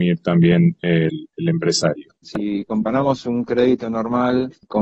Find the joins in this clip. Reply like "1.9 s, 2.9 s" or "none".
2.2 s